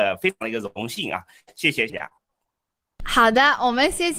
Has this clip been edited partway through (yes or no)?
yes